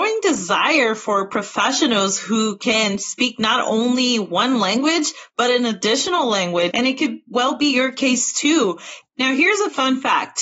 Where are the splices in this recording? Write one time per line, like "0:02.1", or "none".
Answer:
0:06.7
0:09.0